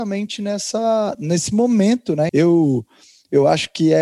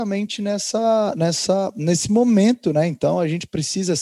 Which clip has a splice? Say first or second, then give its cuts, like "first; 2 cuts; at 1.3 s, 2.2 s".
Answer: first; 2 cuts; at 1.1 s, 2.3 s